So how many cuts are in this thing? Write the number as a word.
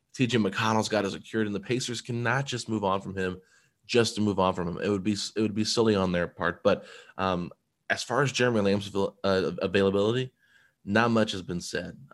zero